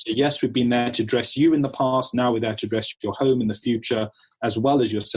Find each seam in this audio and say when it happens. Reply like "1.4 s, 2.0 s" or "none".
none